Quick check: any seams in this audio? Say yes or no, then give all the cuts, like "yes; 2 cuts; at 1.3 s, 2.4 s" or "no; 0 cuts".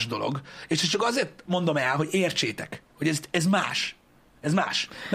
no; 0 cuts